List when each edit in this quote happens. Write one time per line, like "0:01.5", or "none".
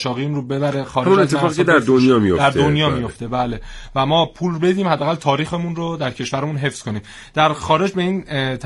none